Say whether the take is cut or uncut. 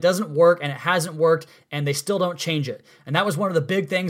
uncut